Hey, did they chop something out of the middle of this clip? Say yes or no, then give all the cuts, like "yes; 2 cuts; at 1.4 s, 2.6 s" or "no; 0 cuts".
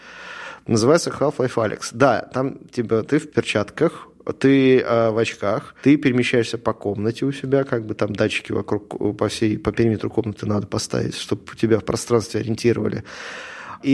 no; 0 cuts